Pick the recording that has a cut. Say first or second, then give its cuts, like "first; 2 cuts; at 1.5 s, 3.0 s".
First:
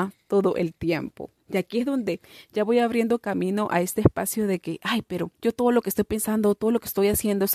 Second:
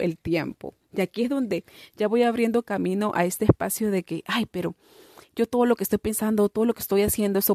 first; 1 cut; at 5.3 s